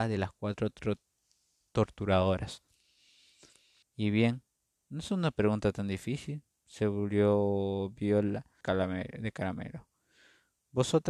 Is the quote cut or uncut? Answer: cut